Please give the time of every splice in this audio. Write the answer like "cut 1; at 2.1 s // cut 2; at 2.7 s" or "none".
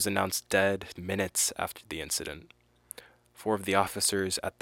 cut 1; at 0.9 s